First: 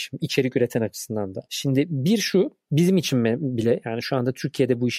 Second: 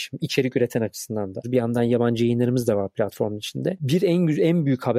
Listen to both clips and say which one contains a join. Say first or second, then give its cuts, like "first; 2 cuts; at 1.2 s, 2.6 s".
second; 1 cut; at 1.4 s